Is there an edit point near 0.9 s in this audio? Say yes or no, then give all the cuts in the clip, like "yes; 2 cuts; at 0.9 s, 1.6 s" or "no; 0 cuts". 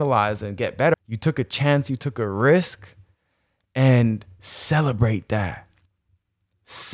yes; 1 cut; at 0.9 s